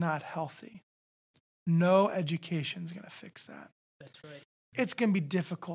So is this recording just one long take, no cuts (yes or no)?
no